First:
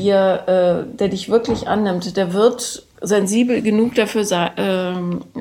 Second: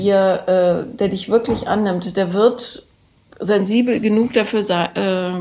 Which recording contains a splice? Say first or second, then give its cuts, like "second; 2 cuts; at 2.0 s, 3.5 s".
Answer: first; 1 cut; at 2.9 s